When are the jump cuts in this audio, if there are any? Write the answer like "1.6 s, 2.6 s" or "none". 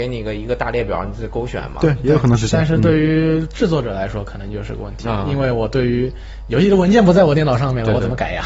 none